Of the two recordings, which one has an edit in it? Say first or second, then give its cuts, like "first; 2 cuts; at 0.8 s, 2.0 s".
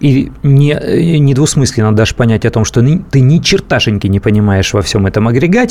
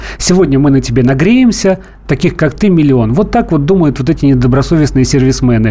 second; 1 cut; at 2.1 s